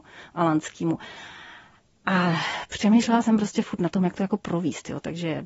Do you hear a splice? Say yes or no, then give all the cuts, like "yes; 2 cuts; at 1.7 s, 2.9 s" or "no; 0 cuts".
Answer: no; 0 cuts